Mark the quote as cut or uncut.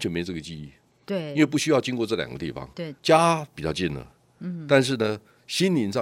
uncut